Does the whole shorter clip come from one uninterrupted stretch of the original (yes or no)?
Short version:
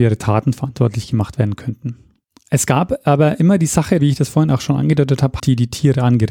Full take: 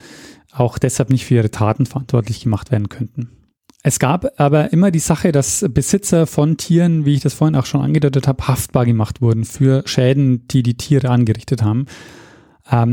no